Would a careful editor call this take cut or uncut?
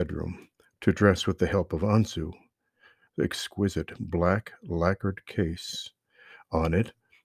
cut